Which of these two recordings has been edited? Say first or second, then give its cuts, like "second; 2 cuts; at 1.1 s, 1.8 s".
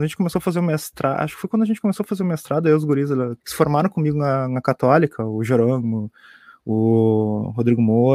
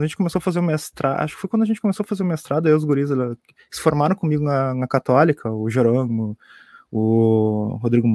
first; 1 cut; at 3.4 s